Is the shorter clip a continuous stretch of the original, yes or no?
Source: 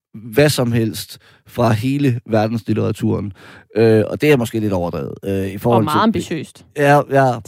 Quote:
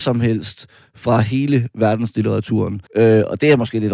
no